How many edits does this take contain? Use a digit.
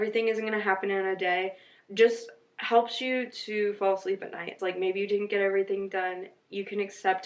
1